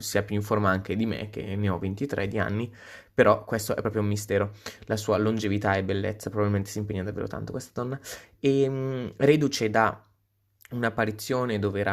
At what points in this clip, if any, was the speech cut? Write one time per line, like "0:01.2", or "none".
none